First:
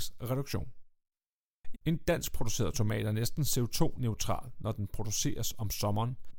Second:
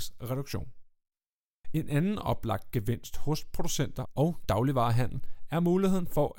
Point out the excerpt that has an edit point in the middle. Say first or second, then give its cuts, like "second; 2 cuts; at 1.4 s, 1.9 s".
first; 1 cut; at 1.7 s